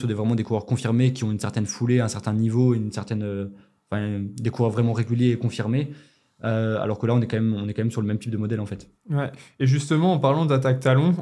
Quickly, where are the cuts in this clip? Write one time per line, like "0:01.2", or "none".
none